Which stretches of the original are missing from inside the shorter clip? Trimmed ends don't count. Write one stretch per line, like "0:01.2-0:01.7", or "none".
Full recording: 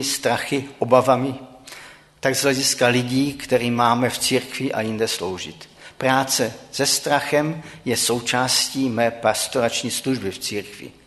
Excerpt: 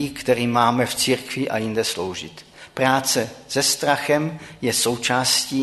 none